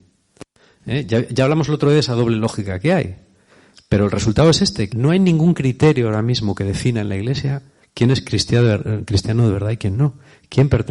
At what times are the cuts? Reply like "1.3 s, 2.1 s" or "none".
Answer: 3.7 s, 4.9 s